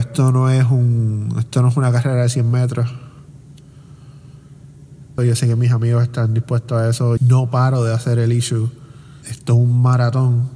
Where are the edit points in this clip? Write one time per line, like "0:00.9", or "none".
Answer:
0:05.2
0:07.2
0:09.2